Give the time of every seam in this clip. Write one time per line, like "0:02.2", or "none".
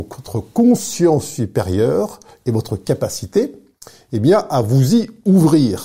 none